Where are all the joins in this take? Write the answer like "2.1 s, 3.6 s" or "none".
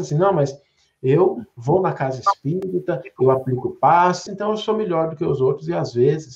4.3 s